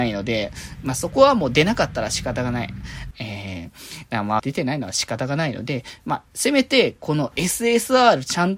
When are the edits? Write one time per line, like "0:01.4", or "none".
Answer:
0:03.1
0:04.4